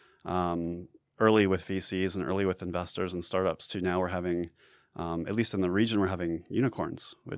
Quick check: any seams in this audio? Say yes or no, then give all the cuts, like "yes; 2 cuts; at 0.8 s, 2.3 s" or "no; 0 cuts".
no; 0 cuts